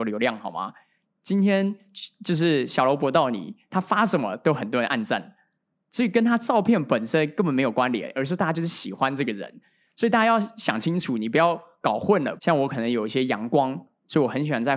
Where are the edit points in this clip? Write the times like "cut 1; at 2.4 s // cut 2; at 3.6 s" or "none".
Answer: cut 1; at 12.4 s

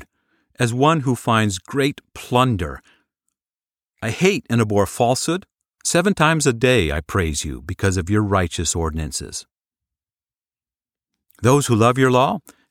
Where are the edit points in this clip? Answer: cut 1; at 5.7 s

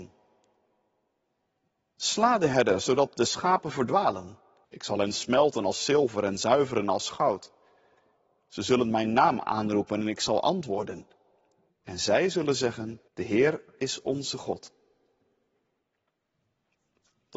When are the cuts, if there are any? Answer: cut 1; at 4.6 s // cut 2; at 11.7 s // cut 3; at 13.1 s

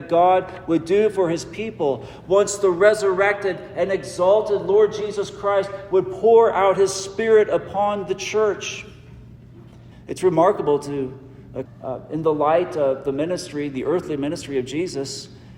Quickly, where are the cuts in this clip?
cut 1; at 9.9 s // cut 2; at 11.6 s

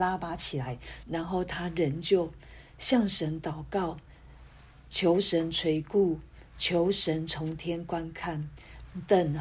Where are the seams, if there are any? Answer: cut 1; at 1.0 s

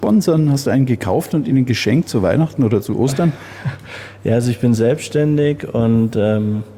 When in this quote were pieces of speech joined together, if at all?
none

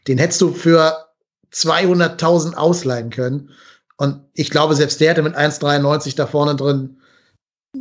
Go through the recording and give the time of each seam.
none

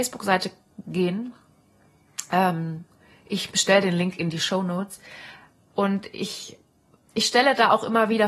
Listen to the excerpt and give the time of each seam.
none

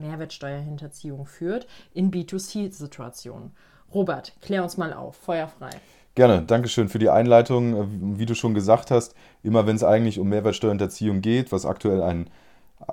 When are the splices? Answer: none

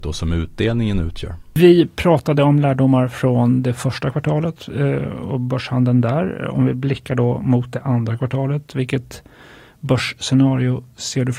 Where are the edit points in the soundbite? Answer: none

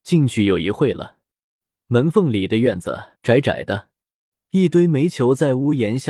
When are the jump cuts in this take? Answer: cut 1; at 1.8 s // cut 2; at 3.1 s

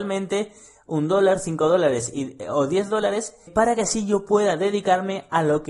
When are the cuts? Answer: cut 1; at 3.5 s

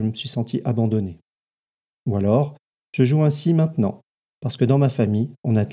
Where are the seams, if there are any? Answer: none

